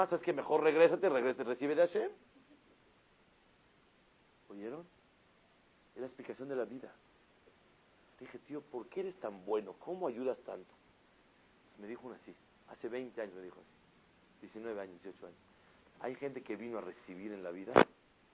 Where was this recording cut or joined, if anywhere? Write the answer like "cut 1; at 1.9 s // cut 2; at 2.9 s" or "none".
cut 1; at 8.1 s // cut 2; at 15.9 s